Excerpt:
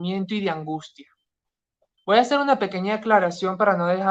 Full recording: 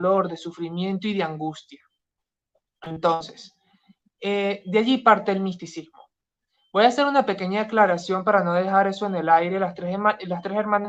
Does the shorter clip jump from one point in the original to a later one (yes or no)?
yes